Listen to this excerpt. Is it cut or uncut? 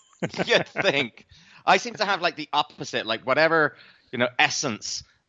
uncut